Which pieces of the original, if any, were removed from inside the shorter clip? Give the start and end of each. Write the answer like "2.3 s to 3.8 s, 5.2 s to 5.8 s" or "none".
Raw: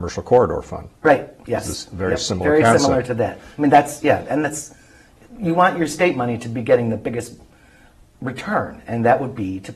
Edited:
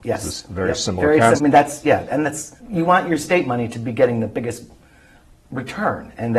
2.8 s to 3.5 s, 4.8 s to 5.3 s